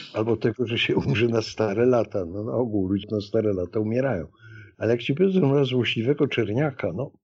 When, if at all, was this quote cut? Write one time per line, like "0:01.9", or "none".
0:03.0
0:04.7